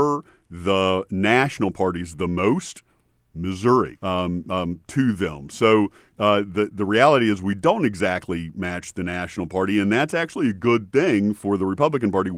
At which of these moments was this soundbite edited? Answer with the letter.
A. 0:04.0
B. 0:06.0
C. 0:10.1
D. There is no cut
A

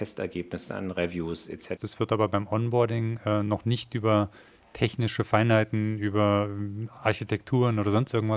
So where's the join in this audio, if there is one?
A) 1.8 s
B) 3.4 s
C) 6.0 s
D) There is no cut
A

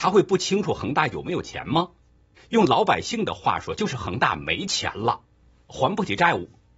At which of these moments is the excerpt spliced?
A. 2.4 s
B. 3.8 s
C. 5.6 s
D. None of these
A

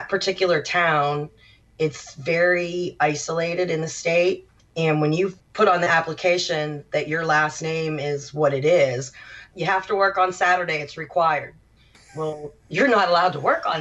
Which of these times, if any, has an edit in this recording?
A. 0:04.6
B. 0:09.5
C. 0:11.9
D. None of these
B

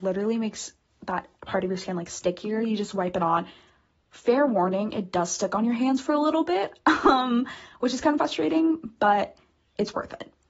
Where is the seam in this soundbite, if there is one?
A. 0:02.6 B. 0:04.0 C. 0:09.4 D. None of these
D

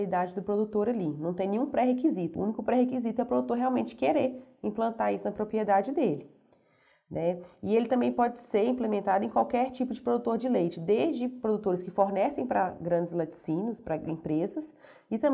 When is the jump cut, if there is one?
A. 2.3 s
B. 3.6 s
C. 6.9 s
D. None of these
D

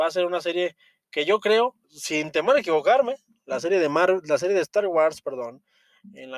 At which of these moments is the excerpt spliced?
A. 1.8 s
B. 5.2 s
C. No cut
A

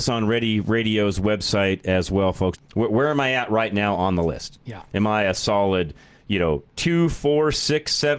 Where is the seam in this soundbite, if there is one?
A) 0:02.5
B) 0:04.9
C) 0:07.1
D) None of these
A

